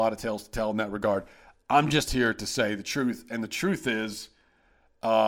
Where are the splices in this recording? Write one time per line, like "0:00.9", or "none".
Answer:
none